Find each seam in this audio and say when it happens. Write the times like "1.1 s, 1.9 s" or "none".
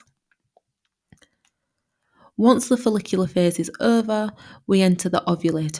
none